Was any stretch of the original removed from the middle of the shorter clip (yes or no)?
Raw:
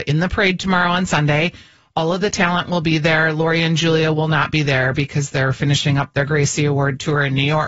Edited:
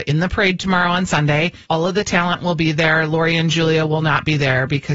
yes